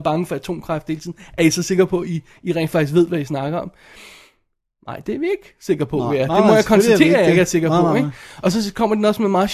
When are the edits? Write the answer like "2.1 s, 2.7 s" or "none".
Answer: none